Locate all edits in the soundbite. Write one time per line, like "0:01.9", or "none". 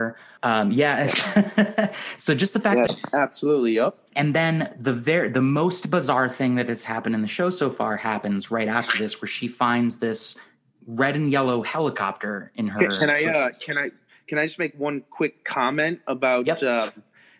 0:02.9